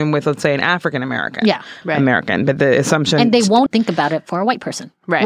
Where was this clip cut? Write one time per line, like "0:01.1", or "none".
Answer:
0:01.8
0:03.7